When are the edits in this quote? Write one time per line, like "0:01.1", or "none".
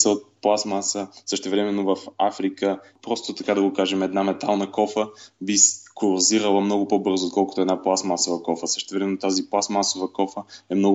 none